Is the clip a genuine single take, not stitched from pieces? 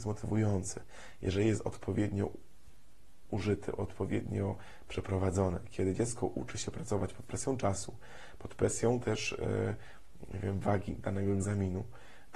yes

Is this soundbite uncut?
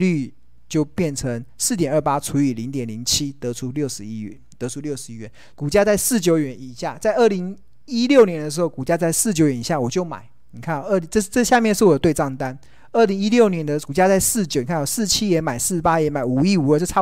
no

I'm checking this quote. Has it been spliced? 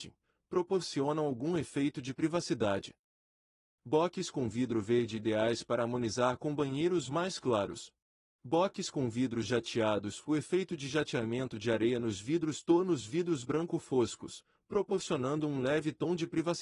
yes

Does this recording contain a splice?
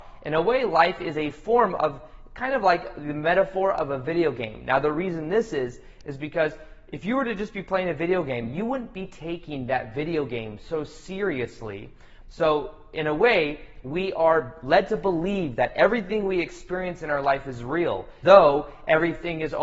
yes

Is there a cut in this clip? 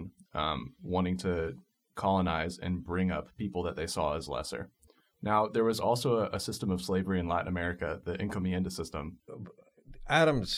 yes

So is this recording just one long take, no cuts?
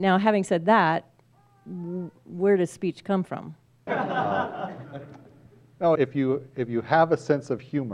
no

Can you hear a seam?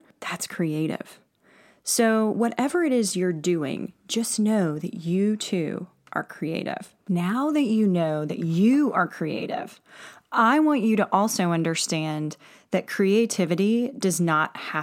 no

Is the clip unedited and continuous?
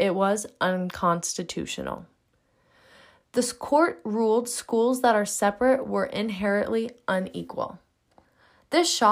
yes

